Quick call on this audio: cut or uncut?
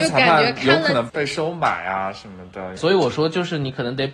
cut